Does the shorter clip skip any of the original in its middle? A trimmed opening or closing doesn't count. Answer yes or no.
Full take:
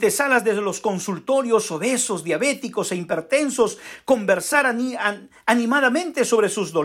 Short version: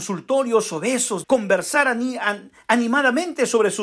yes